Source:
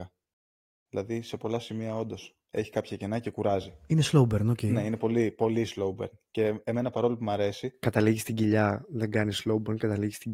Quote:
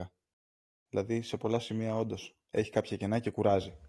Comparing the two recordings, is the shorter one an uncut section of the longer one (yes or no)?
yes